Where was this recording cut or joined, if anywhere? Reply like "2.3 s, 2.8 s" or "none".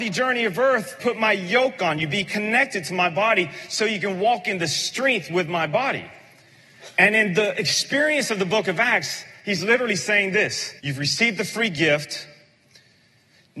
1.0 s, 10.8 s